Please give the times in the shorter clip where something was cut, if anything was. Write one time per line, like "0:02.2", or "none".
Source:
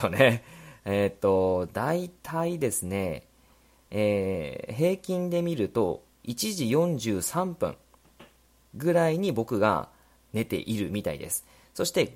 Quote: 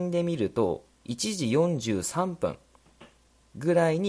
none